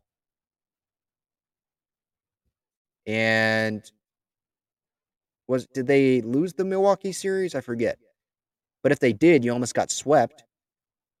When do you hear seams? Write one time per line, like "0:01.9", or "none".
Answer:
none